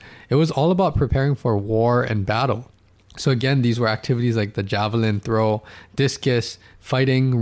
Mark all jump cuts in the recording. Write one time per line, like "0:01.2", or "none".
0:03.0